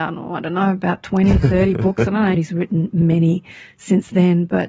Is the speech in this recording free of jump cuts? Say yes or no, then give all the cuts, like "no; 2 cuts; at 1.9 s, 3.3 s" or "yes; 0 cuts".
no; 1 cut; at 2.3 s